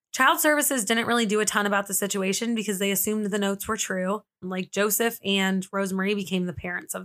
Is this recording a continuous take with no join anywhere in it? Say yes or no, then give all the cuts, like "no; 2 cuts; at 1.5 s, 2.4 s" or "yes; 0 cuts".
no; 1 cut; at 4.4 s